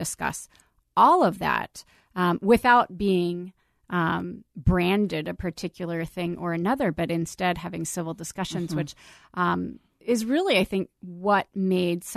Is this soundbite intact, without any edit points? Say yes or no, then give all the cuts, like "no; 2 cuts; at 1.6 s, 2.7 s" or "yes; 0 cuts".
yes; 0 cuts